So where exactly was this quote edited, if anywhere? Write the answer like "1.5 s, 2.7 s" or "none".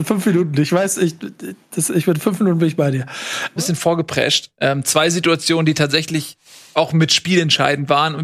3.6 s